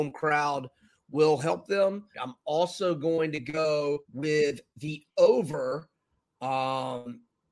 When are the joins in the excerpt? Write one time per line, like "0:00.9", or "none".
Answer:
0:02.1
0:04.0